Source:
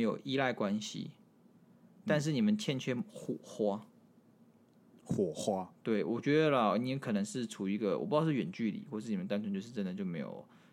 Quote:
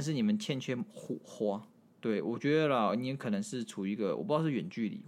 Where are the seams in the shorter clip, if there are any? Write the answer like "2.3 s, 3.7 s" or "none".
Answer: 2.0 s